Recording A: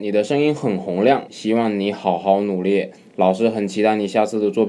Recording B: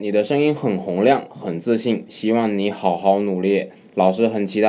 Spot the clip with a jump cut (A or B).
A